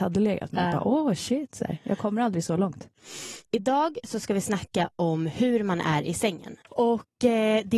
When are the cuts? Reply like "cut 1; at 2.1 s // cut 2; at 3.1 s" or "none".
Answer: cut 1; at 6.6 s

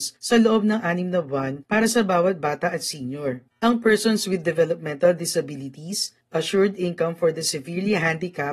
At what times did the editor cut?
cut 1; at 3.5 s

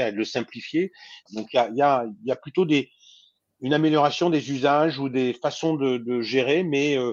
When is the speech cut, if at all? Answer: cut 1; at 1.3 s

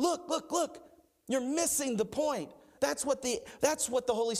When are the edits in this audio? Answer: cut 1; at 2.8 s

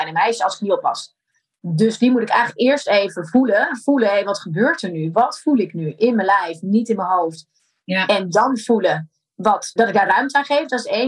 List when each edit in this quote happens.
cut 1; at 9.8 s

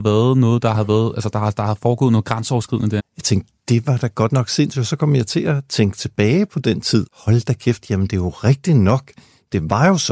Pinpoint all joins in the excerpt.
cut 1; at 3.0 s // cut 2; at 7.1 s

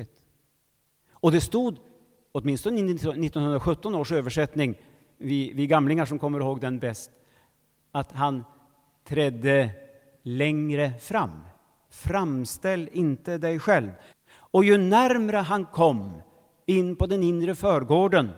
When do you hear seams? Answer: cut 1; at 11.8 s // cut 2; at 14.1 s

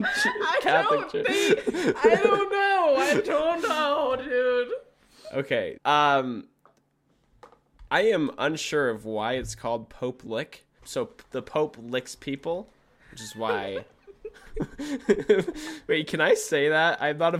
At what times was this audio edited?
cut 1; at 5.8 s // cut 2; at 10.8 s

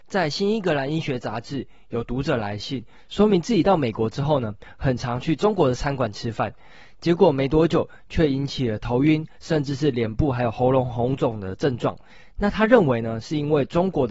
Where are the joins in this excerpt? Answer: none

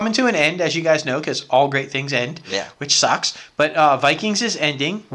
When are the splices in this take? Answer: none

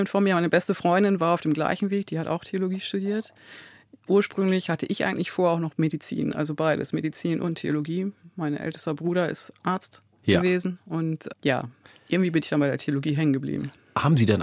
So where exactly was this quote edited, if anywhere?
none

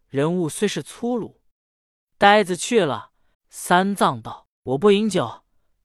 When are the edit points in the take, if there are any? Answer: cut 1; at 1.5 s // cut 2; at 3.3 s

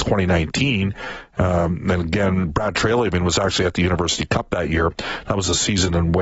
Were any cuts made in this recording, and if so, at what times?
none

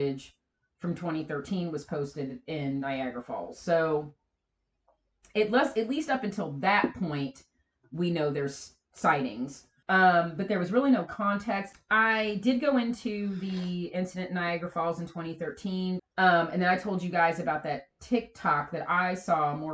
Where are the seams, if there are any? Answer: cut 1; at 9.8 s // cut 2; at 11.7 s // cut 3; at 16.0 s

